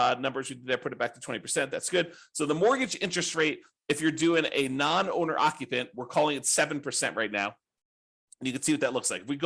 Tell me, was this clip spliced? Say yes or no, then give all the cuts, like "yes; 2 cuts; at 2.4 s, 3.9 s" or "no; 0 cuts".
no; 0 cuts